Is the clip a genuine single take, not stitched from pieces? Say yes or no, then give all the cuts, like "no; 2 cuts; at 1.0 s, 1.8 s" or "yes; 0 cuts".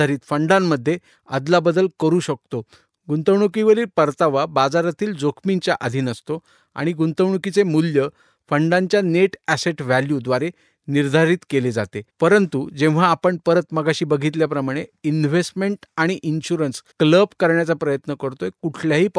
no; 2 cuts; at 12.1 s, 16.9 s